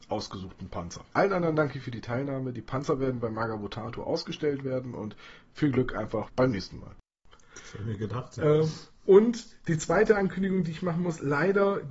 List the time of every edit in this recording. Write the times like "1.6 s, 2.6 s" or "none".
7.5 s